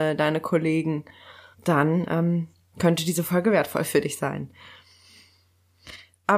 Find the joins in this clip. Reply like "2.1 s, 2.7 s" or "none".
1.5 s